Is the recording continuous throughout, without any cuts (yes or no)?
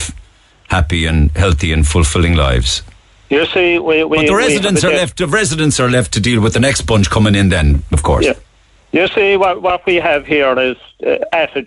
yes